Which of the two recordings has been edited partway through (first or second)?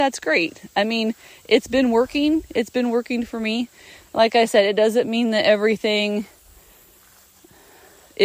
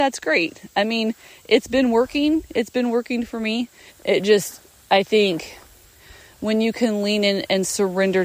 second